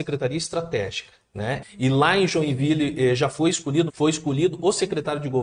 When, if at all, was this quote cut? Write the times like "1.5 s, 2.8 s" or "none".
1.6 s, 3.9 s